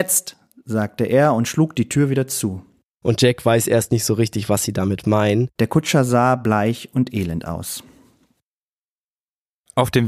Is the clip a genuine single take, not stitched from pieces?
no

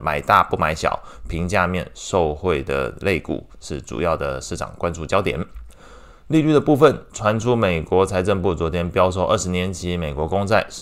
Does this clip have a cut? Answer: no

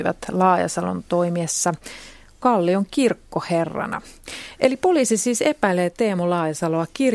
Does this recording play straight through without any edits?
yes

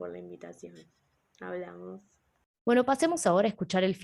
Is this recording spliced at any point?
yes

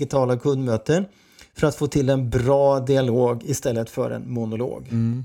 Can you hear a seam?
no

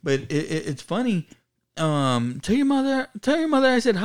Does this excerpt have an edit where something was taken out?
no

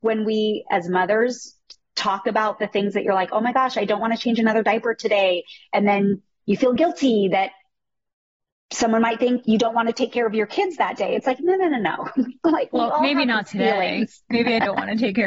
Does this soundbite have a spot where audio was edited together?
no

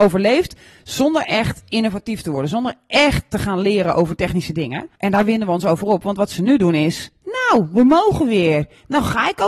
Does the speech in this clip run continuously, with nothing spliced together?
no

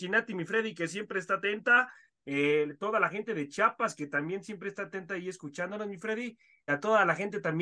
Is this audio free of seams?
no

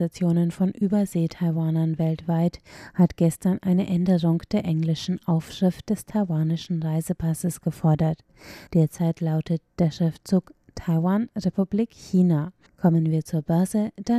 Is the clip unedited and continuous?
no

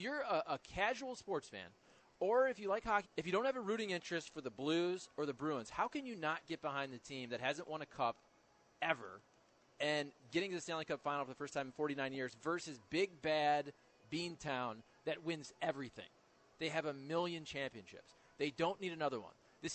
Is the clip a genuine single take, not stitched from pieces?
no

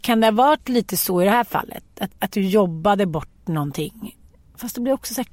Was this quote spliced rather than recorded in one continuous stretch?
yes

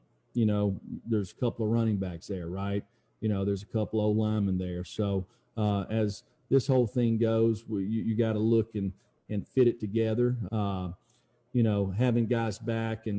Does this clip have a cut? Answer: yes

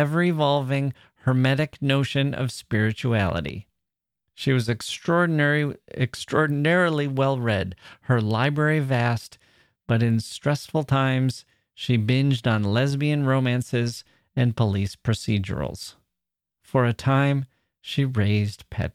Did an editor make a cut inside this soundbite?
no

